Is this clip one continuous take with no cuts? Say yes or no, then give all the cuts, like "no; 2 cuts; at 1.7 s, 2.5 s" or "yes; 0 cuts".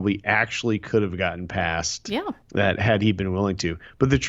no; 1 cut; at 2.4 s